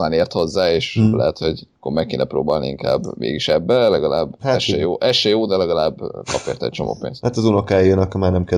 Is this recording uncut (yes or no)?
no